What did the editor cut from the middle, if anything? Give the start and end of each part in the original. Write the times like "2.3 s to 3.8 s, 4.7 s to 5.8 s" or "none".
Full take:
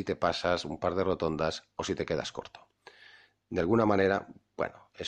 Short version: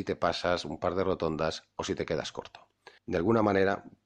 3.0 s to 3.4 s